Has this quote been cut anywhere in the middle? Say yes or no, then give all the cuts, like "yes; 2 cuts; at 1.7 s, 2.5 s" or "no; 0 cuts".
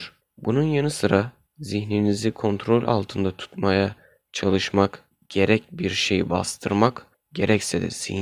no; 0 cuts